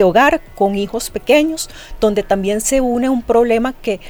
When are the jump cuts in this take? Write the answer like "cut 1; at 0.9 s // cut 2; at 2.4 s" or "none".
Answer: none